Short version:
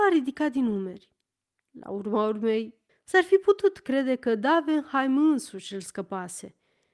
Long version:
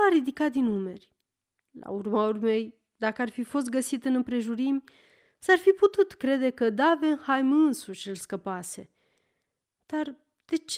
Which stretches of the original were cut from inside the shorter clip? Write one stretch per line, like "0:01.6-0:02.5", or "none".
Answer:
0:02.9-0:05.2